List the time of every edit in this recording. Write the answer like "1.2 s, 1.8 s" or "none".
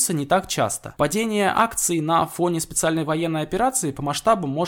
none

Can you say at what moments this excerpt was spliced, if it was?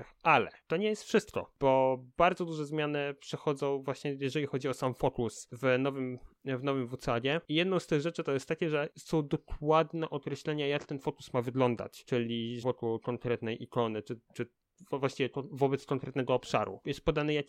12.6 s

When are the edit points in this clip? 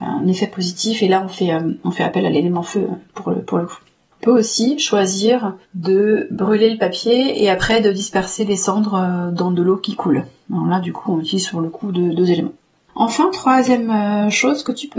5.6 s

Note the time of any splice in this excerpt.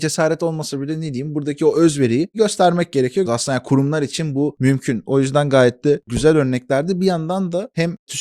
3.3 s

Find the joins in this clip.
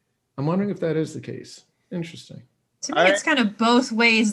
none

